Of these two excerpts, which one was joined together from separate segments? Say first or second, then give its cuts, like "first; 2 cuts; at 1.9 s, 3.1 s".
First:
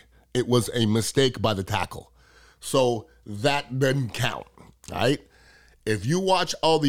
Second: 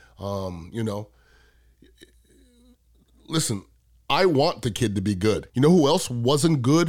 second; 1 cut; at 5.5 s